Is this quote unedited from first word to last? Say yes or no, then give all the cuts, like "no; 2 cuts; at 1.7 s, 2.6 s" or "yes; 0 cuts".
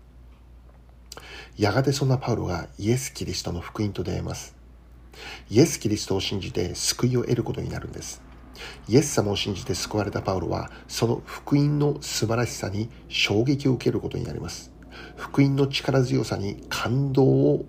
yes; 0 cuts